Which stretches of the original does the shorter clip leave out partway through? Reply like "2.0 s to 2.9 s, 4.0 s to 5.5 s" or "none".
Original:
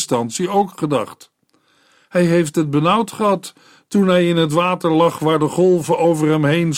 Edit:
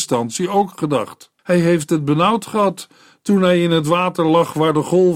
1.4 s to 2.0 s

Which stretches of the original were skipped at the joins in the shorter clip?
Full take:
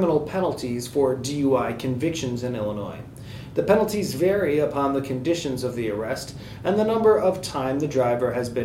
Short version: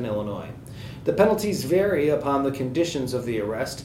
none

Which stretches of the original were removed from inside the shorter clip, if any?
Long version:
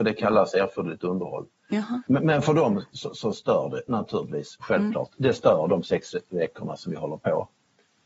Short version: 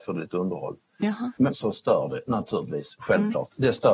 2.2 s to 3.1 s

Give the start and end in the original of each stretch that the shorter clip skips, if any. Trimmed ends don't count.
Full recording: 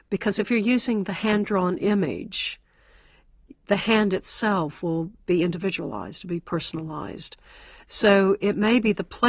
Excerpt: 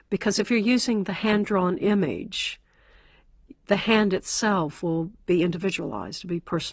none

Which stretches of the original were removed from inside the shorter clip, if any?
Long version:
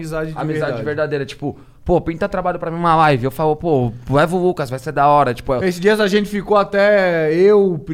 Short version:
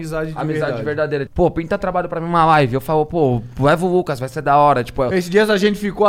1.3 s to 1.8 s

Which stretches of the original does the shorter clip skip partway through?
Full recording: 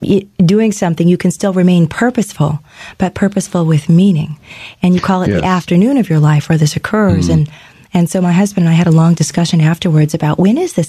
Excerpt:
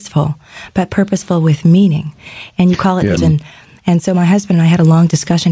5.4 s to 7.2 s

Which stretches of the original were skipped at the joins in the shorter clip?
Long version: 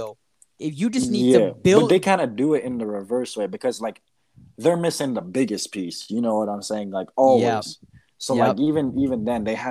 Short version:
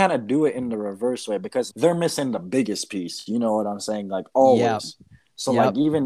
3.8 s to 4.5 s

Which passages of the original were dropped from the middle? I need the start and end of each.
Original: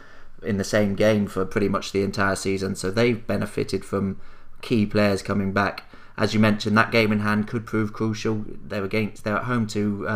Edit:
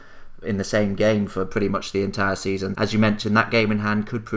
2.7 s to 6.2 s

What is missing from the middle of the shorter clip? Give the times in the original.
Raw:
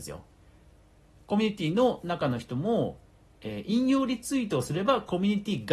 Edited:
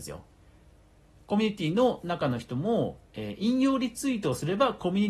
3.0 s to 3.3 s

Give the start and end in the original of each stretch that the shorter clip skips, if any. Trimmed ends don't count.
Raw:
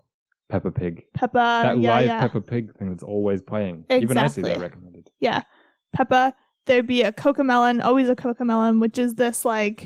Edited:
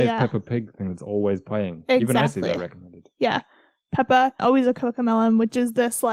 6.4 s to 7.8 s

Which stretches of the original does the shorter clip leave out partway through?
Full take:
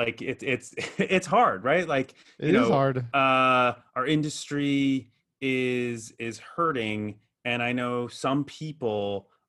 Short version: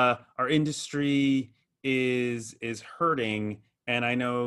none

